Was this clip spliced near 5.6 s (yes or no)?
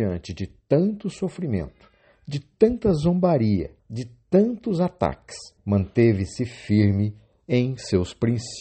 yes